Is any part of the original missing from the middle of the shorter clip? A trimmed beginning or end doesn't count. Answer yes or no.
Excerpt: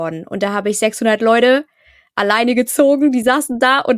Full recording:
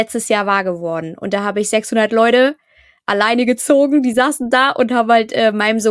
no